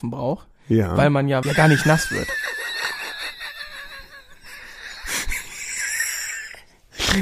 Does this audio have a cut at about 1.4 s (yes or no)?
yes